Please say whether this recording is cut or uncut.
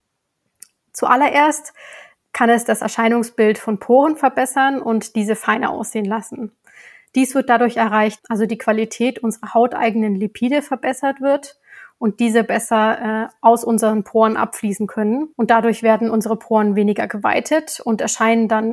cut